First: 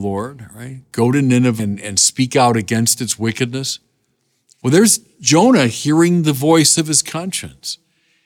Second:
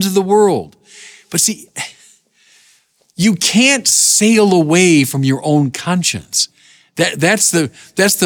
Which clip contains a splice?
first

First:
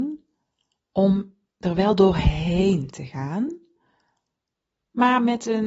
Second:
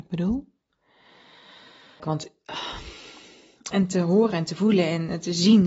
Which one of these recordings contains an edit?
second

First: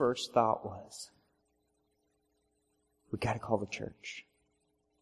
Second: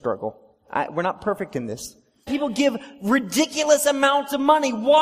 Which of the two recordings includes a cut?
second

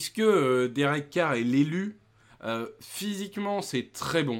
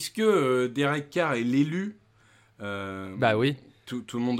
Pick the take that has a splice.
first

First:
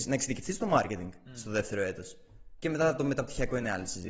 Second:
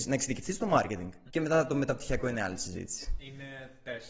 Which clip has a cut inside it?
second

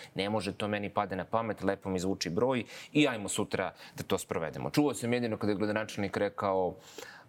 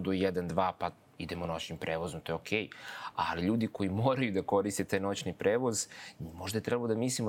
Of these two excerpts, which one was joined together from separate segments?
first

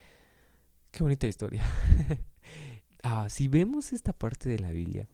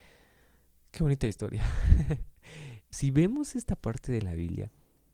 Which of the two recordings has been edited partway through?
second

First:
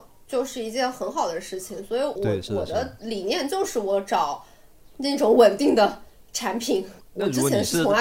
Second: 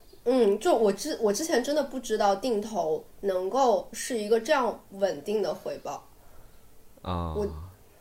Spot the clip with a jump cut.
first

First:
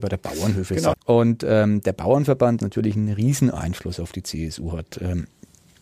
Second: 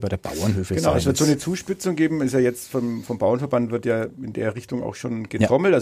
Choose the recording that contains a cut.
first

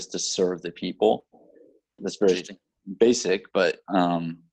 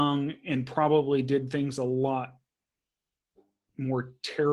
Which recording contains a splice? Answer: first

